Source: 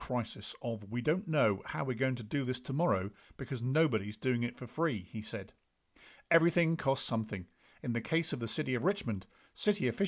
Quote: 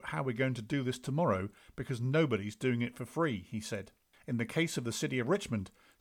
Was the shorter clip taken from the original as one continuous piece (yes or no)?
no